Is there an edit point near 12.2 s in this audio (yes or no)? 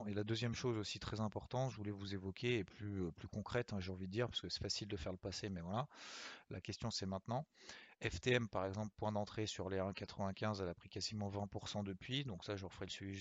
no